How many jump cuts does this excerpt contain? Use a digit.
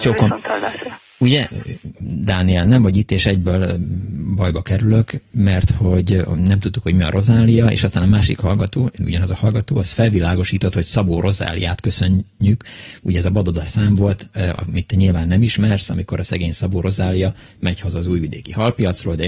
0